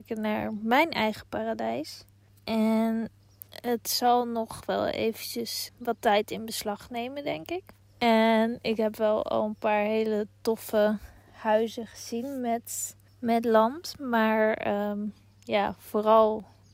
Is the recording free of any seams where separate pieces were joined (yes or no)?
no